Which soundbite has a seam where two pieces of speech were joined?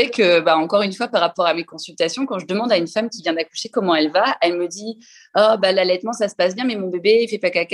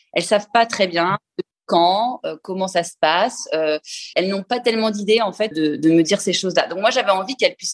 second; 2 cuts; at 4.1 s, 5.5 s

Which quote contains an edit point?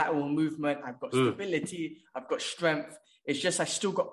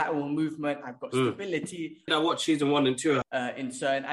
second; 2 cuts; at 2.1 s, 3.2 s

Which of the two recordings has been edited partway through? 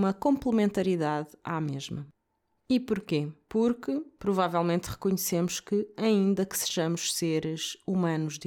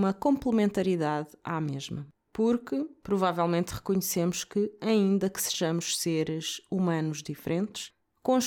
second; 1 cut; at 2.3 s

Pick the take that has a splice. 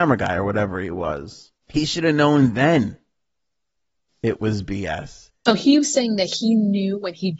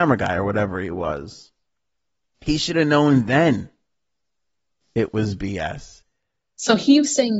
first; 2 cuts; at 1.6 s, 5.5 s

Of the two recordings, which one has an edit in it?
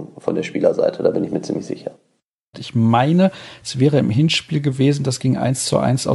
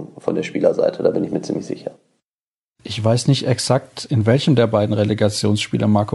first; 1 cut; at 2.5 s

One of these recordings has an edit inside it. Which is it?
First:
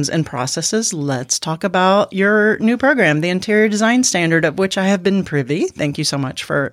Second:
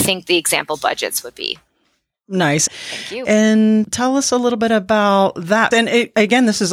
second; 2 cuts; at 2.7 s, 5.7 s

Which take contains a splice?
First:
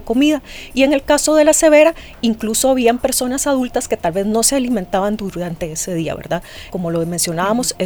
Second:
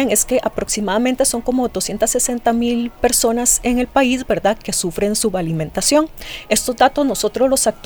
first; 1 cut; at 6.7 s

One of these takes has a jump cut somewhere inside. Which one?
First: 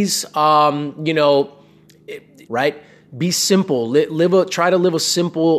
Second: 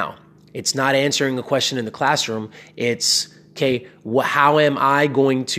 first; 1 cut; at 2.5 s

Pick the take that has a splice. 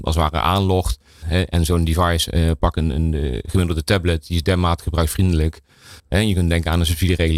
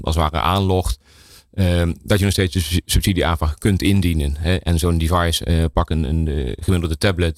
first; 2 cuts; at 1.2 s, 6.0 s

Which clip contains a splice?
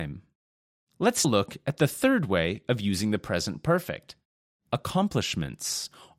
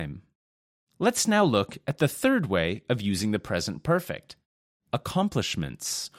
first; 1 cut; at 1.2 s

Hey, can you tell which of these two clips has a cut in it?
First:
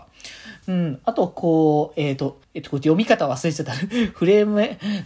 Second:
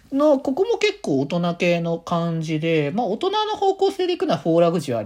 first; 1 cut; at 2.4 s

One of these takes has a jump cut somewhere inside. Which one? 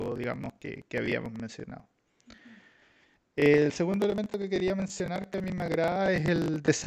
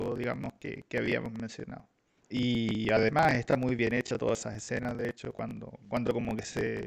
second; 1 cut; at 2.2 s

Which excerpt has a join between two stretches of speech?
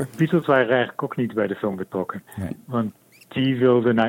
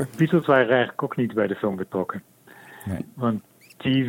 first; 1 cut; at 2.3 s

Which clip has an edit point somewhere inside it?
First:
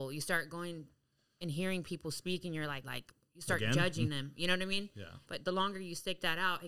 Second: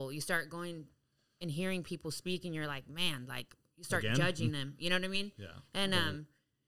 first; 2 cuts; at 2.8 s, 5.3 s

